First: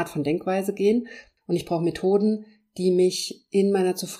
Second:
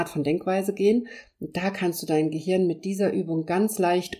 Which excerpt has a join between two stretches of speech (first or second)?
first